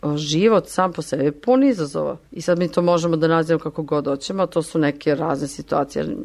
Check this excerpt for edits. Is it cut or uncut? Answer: cut